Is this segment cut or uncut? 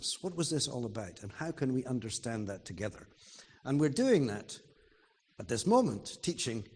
uncut